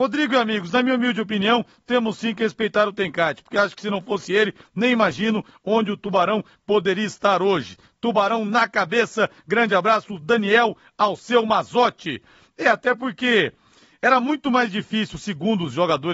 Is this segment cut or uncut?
uncut